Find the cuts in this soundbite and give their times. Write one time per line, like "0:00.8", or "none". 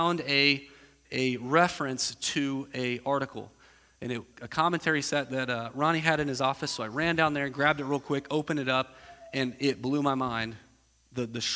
0:04.3